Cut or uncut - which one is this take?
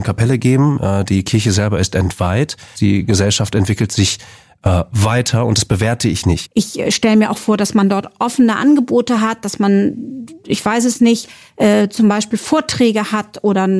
cut